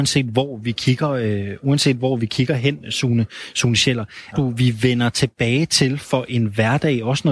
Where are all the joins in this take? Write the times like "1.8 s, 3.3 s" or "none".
4.3 s